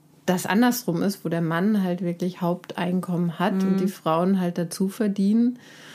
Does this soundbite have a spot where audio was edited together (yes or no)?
no